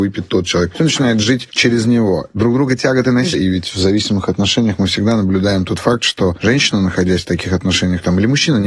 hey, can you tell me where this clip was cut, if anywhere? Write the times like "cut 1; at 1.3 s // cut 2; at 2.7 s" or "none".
cut 1; at 3.3 s